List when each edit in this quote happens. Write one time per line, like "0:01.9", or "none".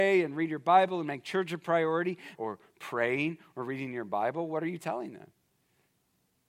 0:02.4